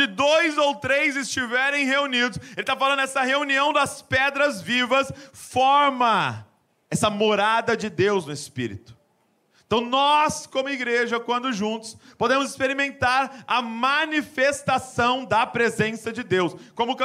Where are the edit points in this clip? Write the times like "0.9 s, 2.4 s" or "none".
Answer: none

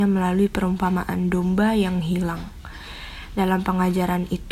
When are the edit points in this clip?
none

